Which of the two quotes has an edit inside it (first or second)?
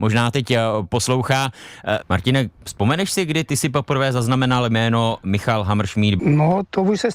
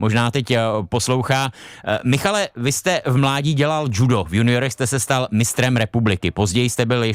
first